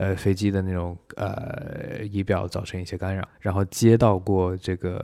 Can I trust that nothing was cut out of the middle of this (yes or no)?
no